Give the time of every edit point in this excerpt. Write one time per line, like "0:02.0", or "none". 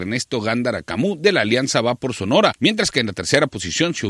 0:02.5